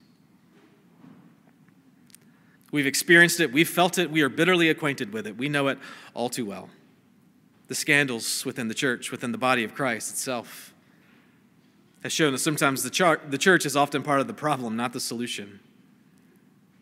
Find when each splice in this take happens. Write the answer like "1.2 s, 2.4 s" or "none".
2.6 s, 7.5 s